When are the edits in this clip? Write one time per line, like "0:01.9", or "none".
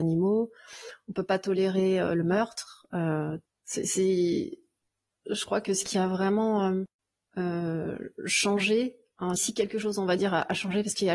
0:03.5
0:09.4